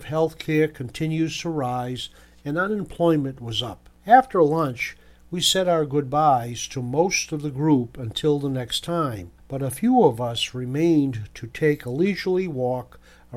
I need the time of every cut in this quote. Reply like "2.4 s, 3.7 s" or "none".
none